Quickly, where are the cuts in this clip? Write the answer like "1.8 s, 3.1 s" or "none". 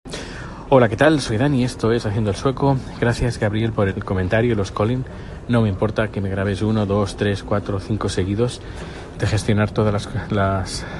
3.9 s, 9.1 s